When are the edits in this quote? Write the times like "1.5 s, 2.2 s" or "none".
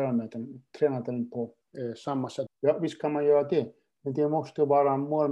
2.5 s